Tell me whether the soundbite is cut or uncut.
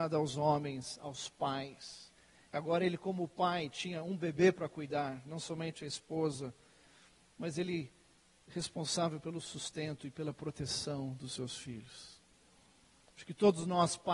uncut